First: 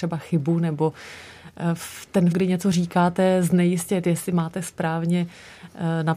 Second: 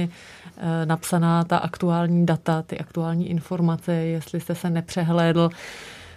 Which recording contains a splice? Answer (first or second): first